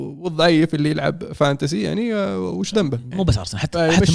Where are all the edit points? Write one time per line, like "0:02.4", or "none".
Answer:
0:03.1